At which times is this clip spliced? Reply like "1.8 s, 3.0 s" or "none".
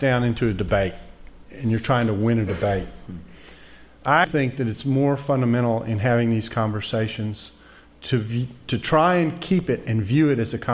4.2 s